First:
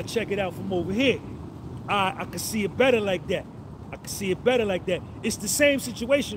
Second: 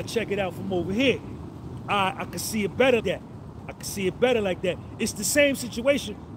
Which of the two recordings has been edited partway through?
second; 1 cut; at 3.0 s

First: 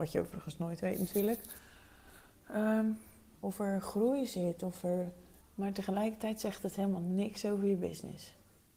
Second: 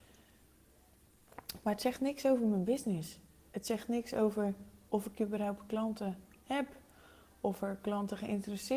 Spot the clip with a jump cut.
first; 2 cuts; at 3.4 s, 5.4 s

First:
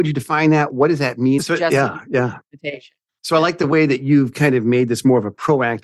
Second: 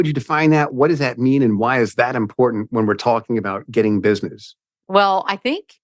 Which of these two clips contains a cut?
first; 1 cut; at 1.4 s

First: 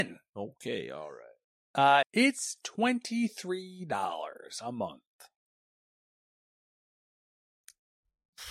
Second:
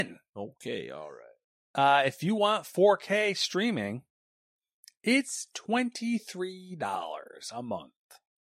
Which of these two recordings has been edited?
first; 1 cut; at 2.0 s

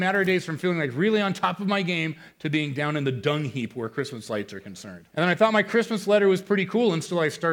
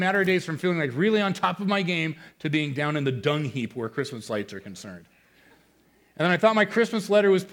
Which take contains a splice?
first; 1 cut; at 5.1 s

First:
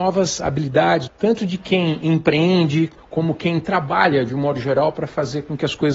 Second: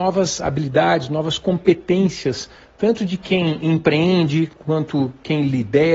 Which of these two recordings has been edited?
first; 2 cuts; at 1.1 s, 3.0 s

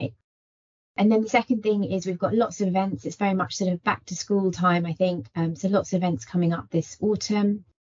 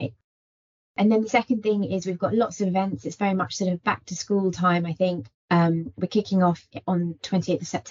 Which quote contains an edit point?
second; 1 cut; at 5.3 s

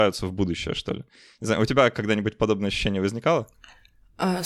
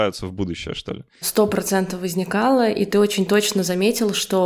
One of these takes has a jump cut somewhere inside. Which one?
second; 1 cut; at 1.2 s

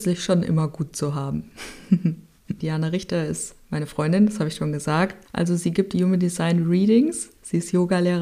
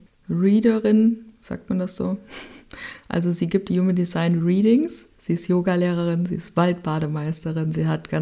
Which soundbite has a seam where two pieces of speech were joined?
first; 2 cuts; at 2.6 s, 5.2 s

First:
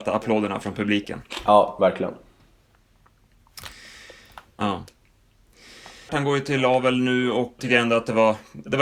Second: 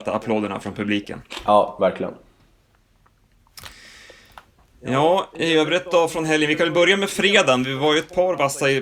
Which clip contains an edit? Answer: first; 3 cuts; at 4.6 s, 6.1 s, 7.6 s

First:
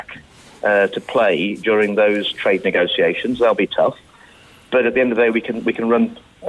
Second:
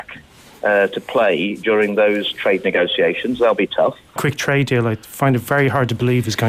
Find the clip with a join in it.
second; 1 cut; at 4.2 s

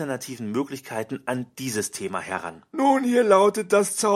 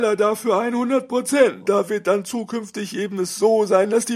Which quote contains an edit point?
second; 1 cut; at 1.6 s

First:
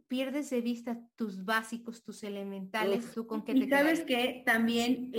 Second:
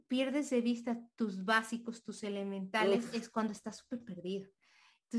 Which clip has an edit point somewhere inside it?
first; 1 cut; at 3.1 s

